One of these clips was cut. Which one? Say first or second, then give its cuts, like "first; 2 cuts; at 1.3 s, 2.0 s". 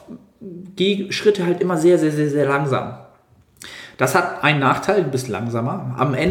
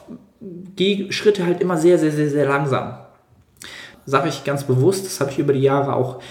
second; 1 cut; at 3.9 s